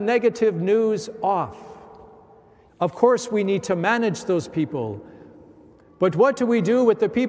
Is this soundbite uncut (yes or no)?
no